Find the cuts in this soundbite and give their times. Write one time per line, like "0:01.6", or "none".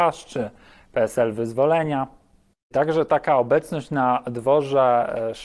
0:02.7